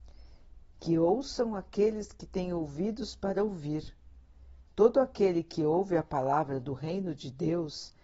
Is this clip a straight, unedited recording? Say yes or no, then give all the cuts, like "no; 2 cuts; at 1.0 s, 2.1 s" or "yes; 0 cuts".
no; 1 cut; at 4.7 s